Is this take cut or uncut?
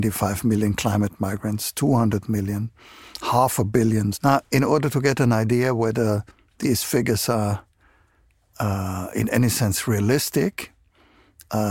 cut